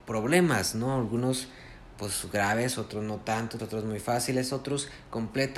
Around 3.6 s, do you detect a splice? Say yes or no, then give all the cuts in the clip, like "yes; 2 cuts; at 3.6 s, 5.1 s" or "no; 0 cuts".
yes; 1 cut; at 3.6 s